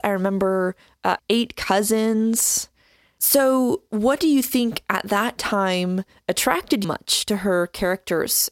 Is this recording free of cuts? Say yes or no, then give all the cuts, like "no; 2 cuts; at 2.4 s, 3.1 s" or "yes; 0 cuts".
no; 2 cuts; at 1.2 s, 6.8 s